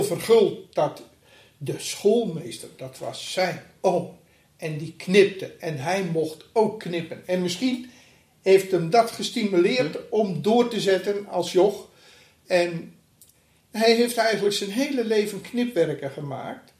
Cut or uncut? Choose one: uncut